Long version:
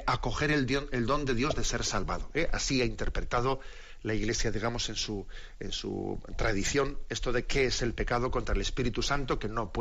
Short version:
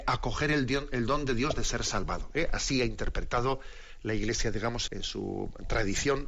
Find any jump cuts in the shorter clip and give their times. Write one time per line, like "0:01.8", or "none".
0:04.9